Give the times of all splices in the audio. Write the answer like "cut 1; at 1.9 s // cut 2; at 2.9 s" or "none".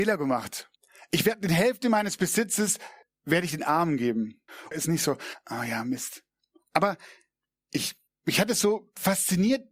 cut 1; at 4.7 s